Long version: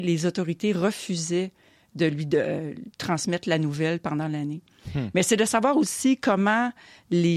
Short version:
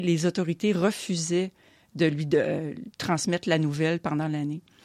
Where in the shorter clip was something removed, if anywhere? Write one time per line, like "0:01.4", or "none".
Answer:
none